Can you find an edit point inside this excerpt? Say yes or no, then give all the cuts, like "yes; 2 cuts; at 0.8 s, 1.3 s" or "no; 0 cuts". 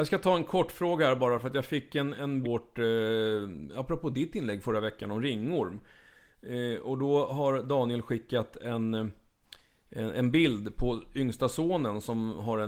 yes; 1 cut; at 2.4 s